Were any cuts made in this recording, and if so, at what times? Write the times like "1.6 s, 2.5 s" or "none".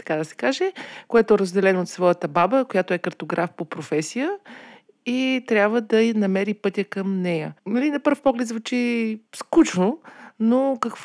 7.6 s, 9.3 s